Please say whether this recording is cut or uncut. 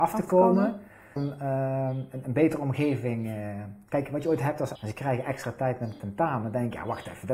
cut